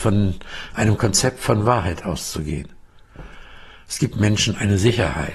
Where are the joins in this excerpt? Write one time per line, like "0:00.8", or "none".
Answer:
none